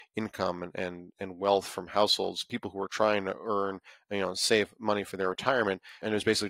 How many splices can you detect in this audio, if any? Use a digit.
0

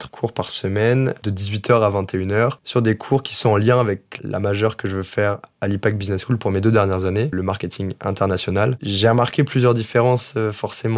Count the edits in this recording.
2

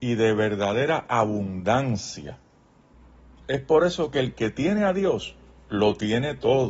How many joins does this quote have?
0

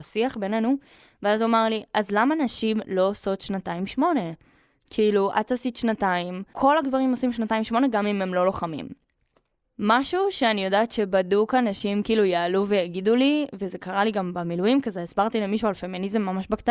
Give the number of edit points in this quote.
1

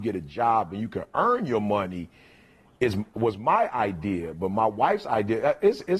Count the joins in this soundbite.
0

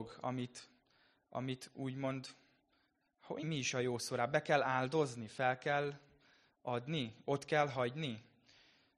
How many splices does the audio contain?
1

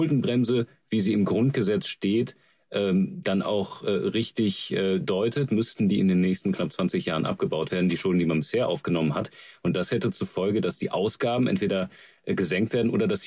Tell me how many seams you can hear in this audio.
0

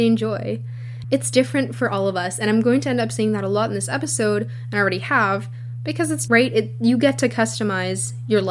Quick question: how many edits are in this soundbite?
2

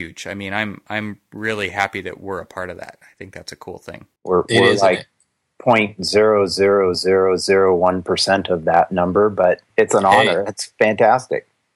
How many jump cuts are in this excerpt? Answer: 3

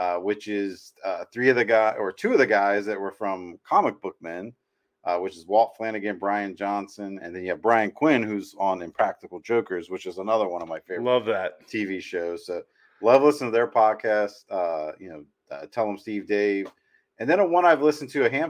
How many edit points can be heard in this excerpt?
0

